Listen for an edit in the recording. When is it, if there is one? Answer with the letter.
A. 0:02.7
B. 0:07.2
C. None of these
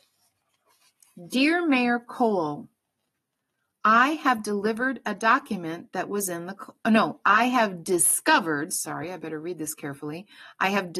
C